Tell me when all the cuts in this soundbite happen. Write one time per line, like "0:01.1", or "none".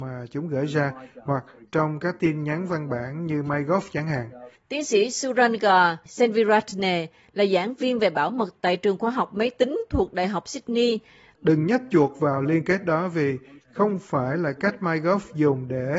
0:04.5
0:11.3